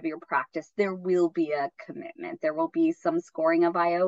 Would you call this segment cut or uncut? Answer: uncut